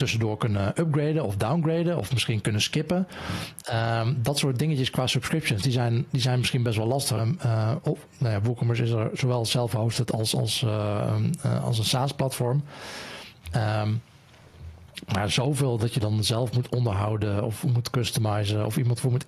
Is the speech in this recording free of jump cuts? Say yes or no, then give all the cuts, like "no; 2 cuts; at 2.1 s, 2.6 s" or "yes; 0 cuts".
no; 1 cut; at 7.2 s